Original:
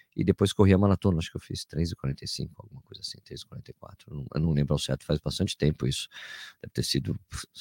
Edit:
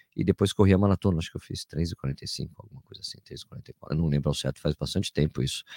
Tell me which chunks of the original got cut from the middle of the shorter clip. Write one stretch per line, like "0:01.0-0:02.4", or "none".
0:03.8-0:04.3